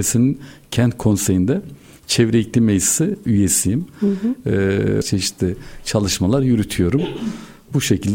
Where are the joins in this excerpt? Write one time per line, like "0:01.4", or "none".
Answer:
0:05.0